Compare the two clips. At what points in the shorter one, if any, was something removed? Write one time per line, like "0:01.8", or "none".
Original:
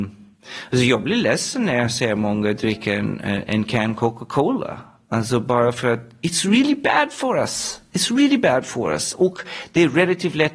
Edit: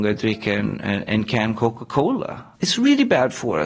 0:02.5